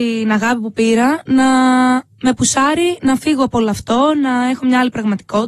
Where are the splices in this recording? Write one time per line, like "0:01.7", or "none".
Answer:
none